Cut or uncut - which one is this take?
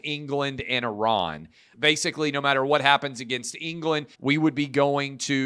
cut